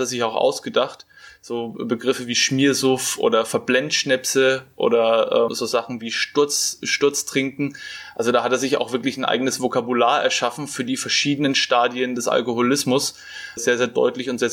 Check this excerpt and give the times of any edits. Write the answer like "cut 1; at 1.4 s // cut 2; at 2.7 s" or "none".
cut 1; at 5.5 s // cut 2; at 13.6 s